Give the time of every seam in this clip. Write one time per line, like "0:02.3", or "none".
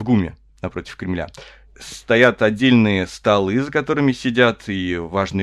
none